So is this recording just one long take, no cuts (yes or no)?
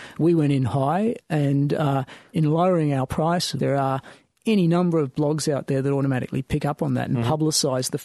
no